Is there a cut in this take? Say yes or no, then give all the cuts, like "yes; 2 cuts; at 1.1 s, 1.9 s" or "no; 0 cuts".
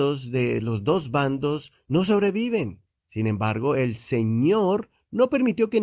no; 0 cuts